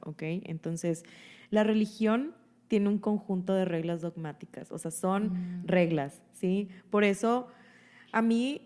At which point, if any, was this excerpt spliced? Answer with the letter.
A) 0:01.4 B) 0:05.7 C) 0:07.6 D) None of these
D